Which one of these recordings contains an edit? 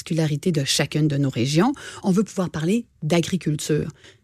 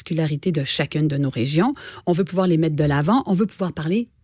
first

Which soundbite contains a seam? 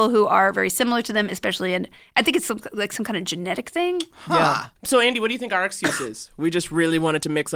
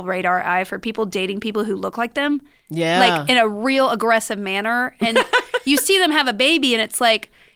first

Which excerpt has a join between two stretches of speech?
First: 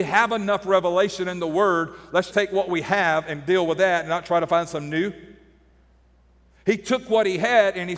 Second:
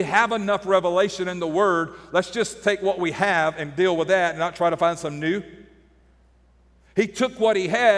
first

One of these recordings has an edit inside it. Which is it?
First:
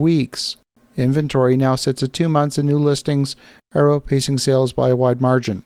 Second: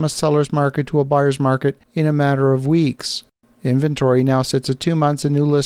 second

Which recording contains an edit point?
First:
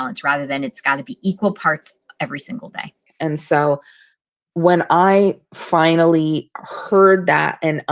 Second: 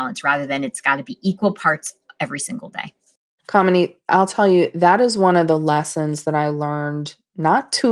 first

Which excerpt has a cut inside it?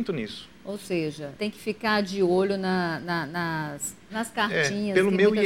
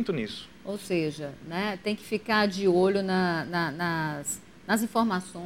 first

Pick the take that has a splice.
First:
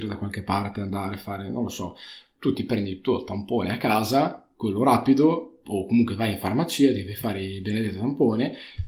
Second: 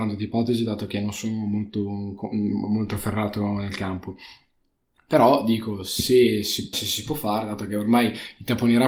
second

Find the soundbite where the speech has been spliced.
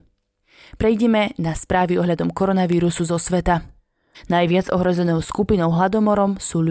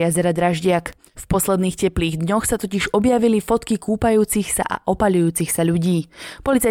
first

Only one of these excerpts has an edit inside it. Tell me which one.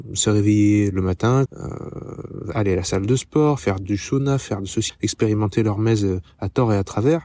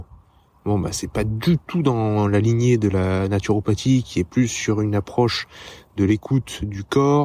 first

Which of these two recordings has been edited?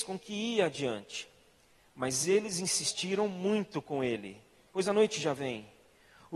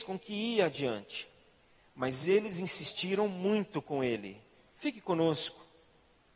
first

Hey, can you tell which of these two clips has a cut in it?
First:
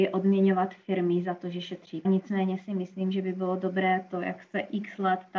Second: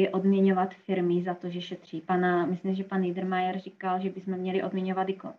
first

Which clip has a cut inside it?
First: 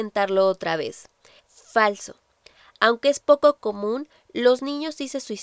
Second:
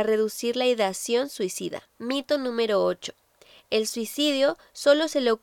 first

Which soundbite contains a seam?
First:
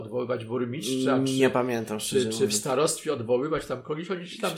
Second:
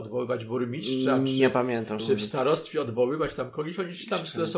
second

